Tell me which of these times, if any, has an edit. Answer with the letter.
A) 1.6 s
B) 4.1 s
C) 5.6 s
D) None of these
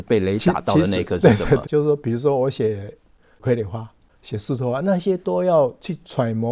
A